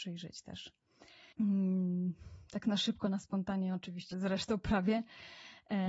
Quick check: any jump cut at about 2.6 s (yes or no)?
no